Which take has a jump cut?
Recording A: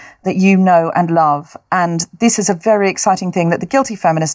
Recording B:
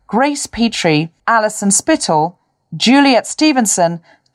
B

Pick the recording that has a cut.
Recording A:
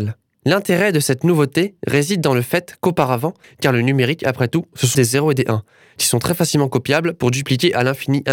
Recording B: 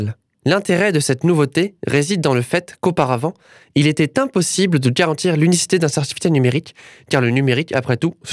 A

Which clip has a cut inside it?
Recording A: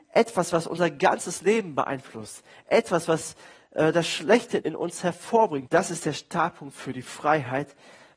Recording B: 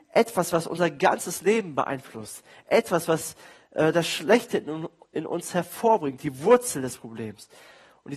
A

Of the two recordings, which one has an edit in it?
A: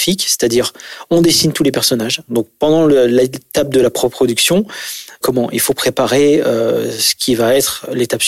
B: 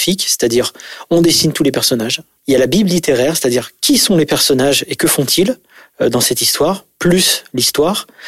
A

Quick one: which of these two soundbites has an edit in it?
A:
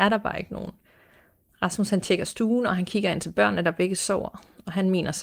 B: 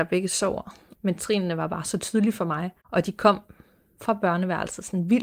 B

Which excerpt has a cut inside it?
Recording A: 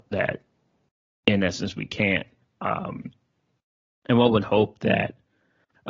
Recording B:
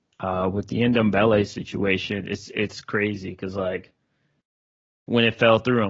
A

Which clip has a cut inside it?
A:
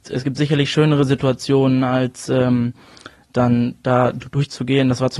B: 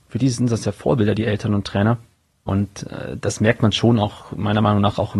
B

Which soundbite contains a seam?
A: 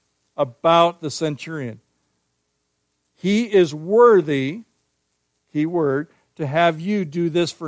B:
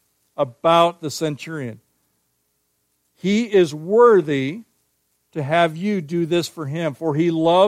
B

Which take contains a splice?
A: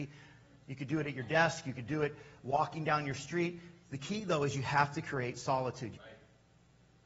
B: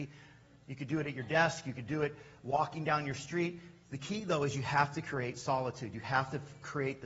A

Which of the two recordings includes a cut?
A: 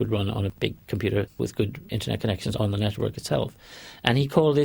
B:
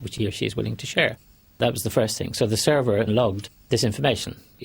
B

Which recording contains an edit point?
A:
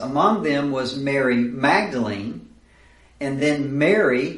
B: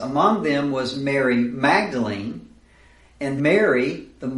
B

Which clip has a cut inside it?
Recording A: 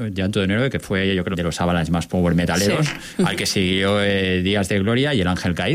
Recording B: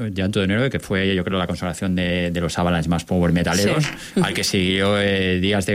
A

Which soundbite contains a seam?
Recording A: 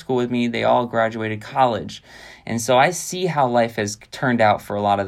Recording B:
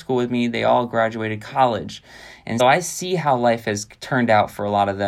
B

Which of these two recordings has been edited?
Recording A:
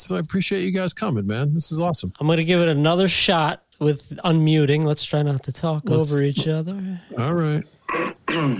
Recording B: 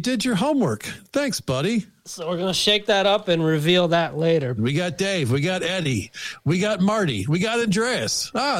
B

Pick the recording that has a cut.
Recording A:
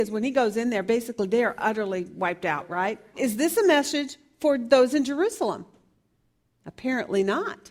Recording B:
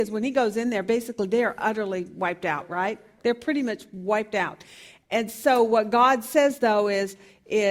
A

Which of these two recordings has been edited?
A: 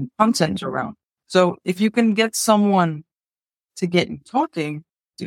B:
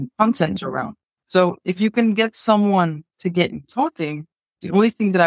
B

